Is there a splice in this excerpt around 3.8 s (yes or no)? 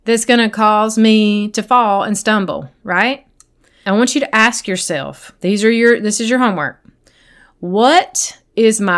yes